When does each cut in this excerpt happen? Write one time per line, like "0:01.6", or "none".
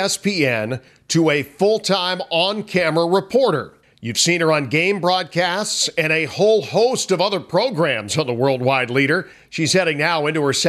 none